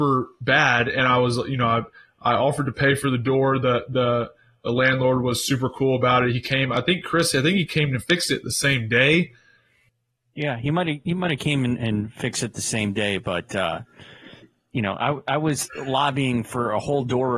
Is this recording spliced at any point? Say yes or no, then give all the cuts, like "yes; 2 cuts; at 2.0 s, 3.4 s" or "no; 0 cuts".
no; 0 cuts